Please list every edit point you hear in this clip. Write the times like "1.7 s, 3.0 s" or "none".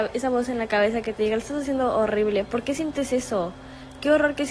none